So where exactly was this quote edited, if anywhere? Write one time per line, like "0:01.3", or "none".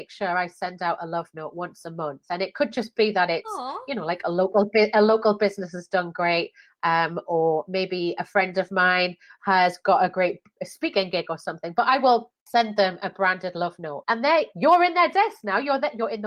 0:12.4
0:14.0